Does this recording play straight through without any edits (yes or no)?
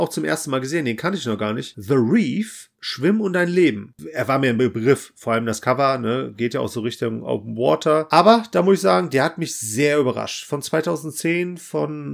yes